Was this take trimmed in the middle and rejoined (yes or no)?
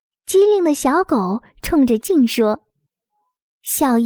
yes